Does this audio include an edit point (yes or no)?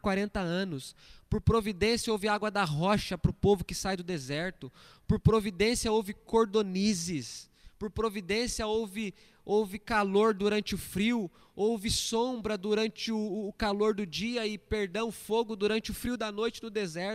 no